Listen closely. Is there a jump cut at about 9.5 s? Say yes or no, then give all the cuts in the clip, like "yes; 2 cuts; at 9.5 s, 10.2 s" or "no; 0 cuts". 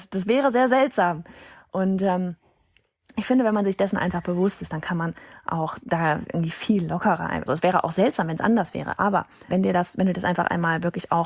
yes; 2 cuts; at 7.5 s, 9.5 s